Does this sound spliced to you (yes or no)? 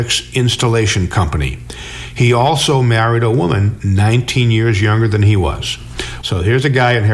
yes